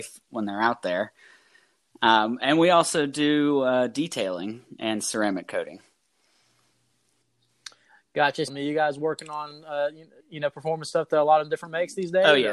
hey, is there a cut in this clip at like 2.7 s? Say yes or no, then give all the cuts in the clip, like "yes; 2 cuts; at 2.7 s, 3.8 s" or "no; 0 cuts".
no; 2 cuts; at 8.5 s, 10.2 s